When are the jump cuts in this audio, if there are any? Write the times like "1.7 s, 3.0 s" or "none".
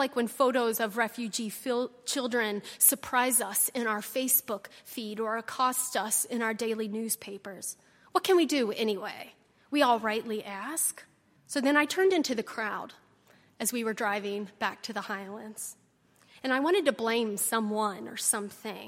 11.4 s